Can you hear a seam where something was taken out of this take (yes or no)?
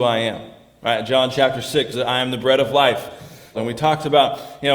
yes